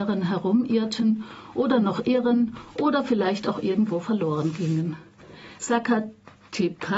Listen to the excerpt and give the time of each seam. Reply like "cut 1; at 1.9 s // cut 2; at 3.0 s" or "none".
cut 1; at 5.6 s